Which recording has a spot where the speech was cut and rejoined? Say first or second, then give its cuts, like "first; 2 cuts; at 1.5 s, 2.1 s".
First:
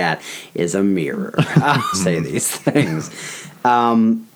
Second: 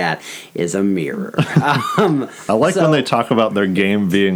first; 1 cut; at 1.9 s